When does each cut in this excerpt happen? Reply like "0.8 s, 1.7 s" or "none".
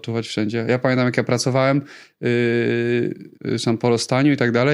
3.4 s